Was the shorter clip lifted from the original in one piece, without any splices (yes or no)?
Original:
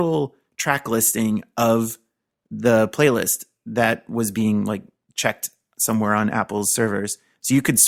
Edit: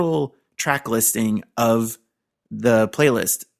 yes